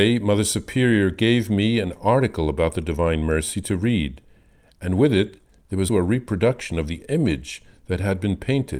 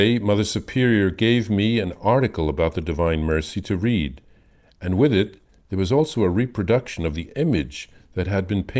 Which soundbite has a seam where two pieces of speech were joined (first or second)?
first